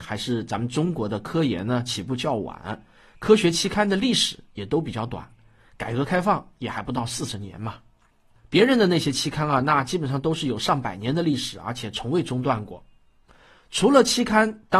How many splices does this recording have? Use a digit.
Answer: 0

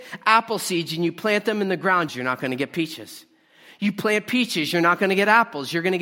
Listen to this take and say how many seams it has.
1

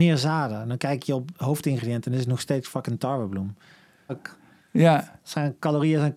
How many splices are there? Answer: 1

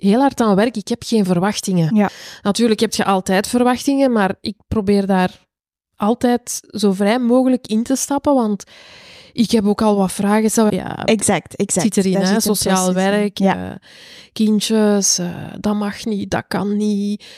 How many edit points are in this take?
1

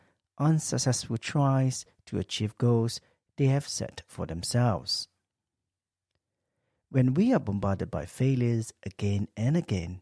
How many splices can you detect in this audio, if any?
0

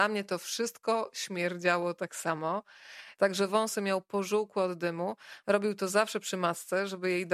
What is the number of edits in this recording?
2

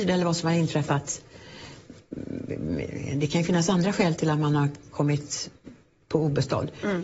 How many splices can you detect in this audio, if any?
0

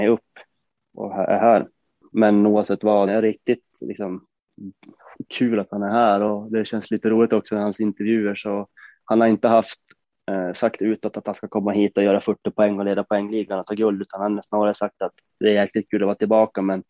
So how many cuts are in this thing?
1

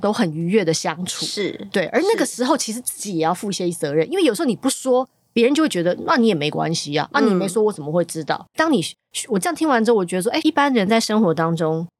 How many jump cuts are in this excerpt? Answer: 2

